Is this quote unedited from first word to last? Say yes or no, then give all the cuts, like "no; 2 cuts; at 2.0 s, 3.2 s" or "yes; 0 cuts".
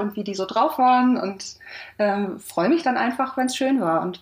yes; 0 cuts